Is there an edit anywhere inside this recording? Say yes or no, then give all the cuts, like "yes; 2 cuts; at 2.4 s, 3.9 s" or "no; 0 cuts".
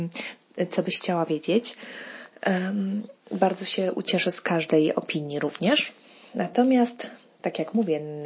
no; 0 cuts